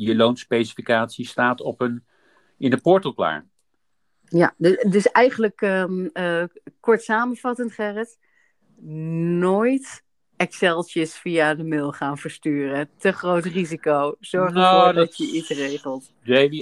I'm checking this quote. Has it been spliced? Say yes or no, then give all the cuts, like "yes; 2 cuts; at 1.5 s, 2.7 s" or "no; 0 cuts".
no; 0 cuts